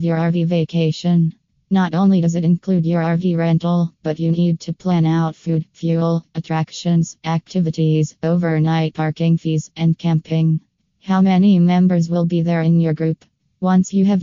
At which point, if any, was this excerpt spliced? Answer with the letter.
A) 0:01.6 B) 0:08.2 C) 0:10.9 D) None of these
C